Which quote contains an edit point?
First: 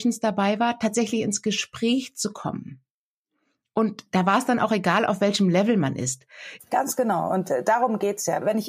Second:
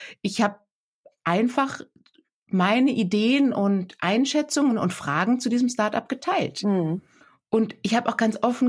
first; 1 cut; at 6.6 s

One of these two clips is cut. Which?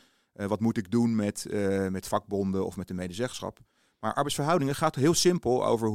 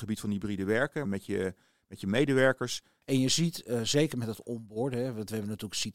second; 2 cuts; at 1.0 s, 3.0 s

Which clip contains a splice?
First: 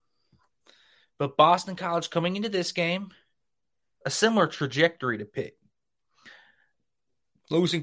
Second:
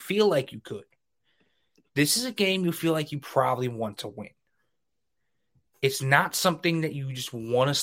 first; 1 cut; at 4.0 s

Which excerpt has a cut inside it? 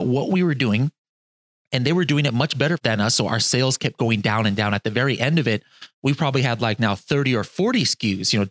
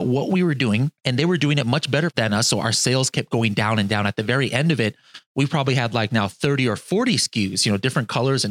second; 1 cut; at 1.0 s

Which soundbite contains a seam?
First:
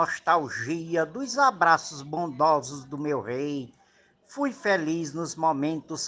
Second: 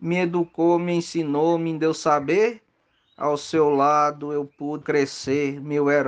second; 1 cut; at 4.8 s

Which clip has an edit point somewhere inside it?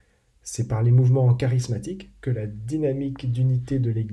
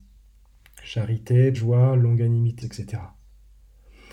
second; 2 cuts; at 1.5 s, 2.6 s

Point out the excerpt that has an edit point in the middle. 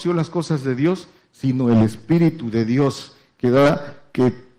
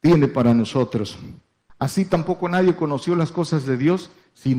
second; 1 cut; at 1.7 s

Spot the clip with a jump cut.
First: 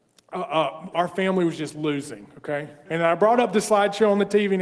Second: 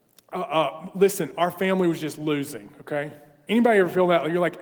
first; 2 cuts; at 0.9 s, 2.9 s

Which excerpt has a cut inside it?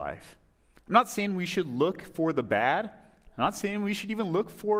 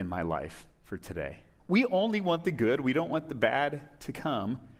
second; 1 cut; at 1.6 s

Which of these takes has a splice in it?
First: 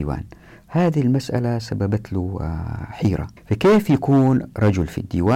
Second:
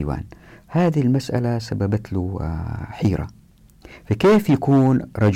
first; 1 cut; at 3.4 s

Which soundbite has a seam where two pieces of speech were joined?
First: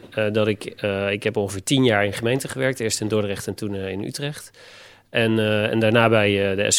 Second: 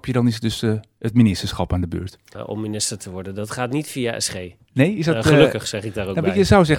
second; 1 cut; at 2.3 s

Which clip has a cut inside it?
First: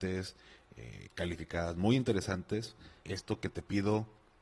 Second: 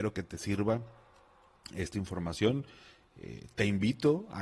first; 1 cut; at 3.0 s

